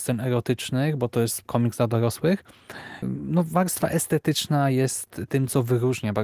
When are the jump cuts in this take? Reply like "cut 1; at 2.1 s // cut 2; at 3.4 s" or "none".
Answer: cut 1; at 1.5 s // cut 2; at 3.0 s